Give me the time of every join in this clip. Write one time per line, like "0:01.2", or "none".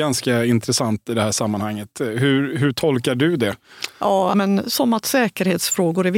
0:04.3